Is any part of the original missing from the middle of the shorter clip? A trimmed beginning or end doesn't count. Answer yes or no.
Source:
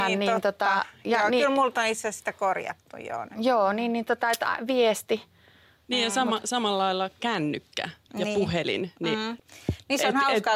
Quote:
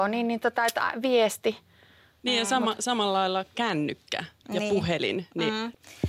no